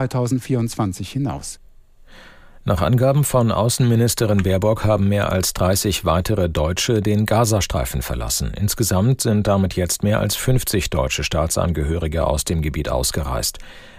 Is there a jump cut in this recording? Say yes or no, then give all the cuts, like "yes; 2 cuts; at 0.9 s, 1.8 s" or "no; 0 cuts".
no; 0 cuts